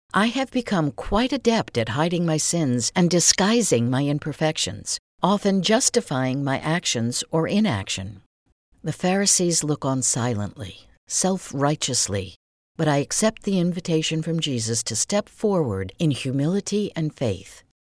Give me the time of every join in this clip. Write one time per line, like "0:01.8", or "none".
none